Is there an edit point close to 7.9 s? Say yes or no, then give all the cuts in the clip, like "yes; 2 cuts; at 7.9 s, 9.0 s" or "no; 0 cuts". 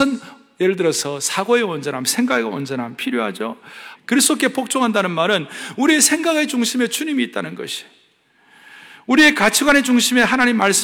no; 1 cut; at 3.9 s